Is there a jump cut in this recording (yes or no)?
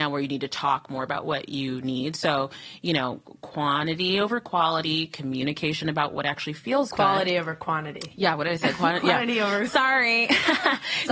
no